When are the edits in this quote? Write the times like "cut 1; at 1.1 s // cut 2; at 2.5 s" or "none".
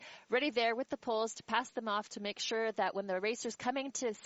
none